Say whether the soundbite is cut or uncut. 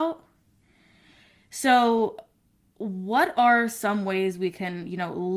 uncut